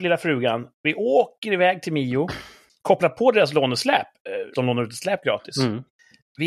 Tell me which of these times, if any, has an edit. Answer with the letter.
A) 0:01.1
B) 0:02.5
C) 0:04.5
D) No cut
C